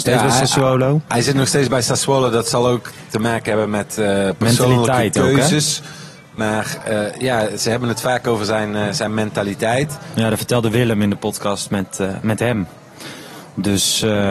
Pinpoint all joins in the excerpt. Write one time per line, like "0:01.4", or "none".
none